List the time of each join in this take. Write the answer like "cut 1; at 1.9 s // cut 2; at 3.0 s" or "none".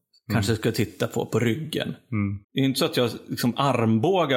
cut 1; at 2.4 s